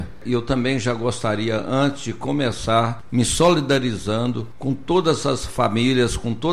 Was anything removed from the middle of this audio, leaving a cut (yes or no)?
no